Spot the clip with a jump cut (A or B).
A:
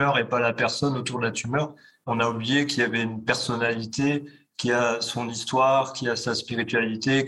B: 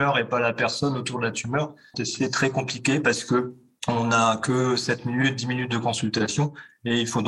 B